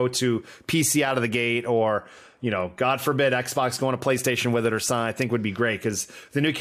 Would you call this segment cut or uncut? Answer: uncut